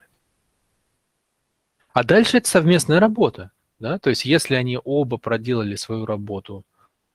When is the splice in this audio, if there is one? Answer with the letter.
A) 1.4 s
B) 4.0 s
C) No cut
C